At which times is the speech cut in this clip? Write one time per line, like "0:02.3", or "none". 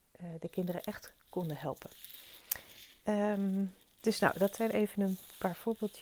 none